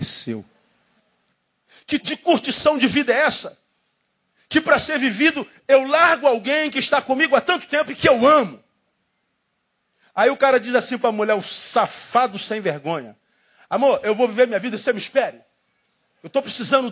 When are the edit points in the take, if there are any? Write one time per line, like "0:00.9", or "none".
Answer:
0:02.0

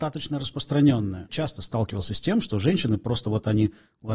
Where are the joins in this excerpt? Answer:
none

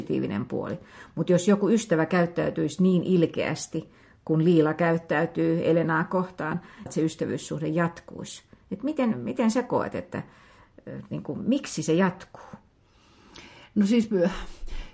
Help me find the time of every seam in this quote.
0:06.9

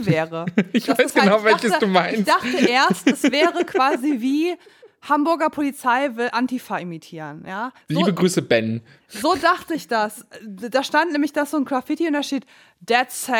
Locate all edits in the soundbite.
0:07.8

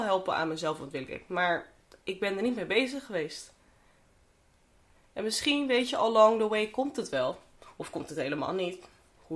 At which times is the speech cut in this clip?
none

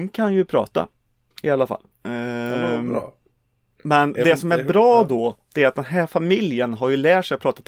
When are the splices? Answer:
0:01.9

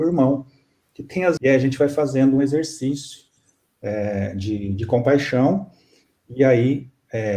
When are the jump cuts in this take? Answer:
0:01.4

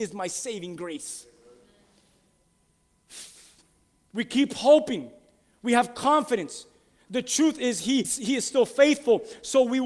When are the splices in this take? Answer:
0:08.0

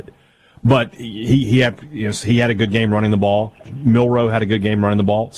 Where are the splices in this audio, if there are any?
none

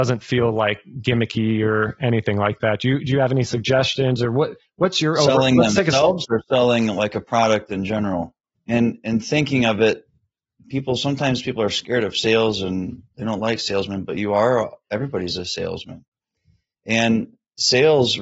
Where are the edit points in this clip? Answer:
0:08.6

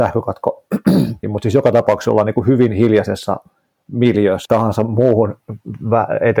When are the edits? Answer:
0:01.2
0:04.5

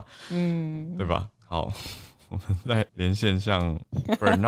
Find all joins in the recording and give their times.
0:01.4
0:02.9

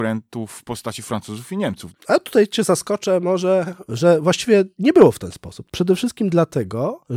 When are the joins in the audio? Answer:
0:01.9
0:05.7

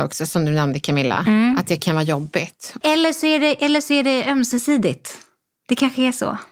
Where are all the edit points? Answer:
0:02.8

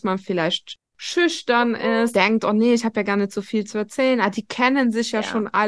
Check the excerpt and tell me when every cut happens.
0:02.1

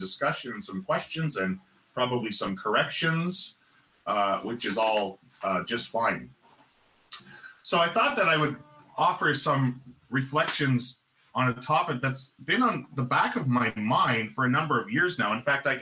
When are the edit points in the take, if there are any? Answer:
0:12.4

